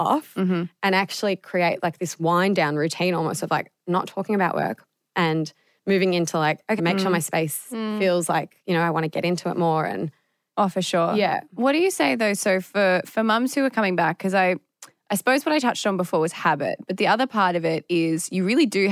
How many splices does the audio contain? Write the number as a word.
one